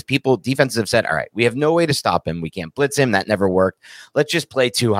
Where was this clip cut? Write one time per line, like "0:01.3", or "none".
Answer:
none